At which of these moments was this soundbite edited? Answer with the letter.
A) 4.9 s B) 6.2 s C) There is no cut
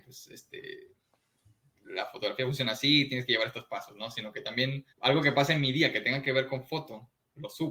A